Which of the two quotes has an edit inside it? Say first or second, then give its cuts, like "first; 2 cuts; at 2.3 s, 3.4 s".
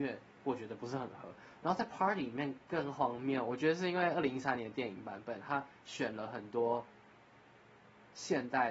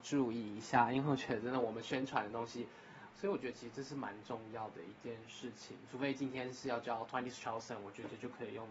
second; 1 cut; at 3.1 s